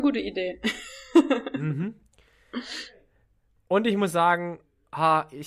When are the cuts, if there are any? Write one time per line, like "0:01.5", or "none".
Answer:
0:03.6